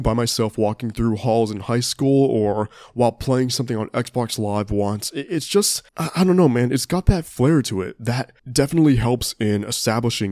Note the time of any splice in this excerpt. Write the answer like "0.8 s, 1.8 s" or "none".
5.9 s, 8.4 s